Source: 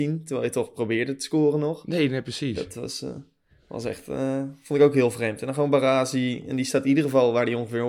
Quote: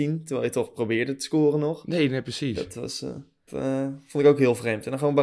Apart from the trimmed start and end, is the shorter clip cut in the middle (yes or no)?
yes